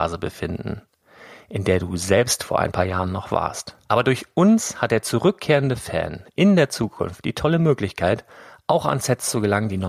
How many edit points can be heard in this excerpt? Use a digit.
1